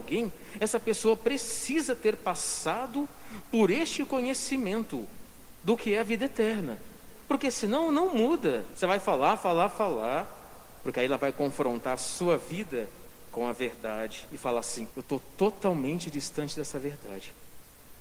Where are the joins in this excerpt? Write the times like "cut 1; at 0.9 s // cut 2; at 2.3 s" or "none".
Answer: cut 1; at 8.7 s // cut 2; at 10.8 s // cut 3; at 14.9 s